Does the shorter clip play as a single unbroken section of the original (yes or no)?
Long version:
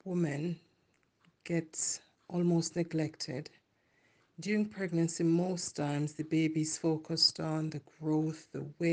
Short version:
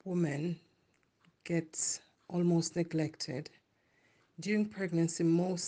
yes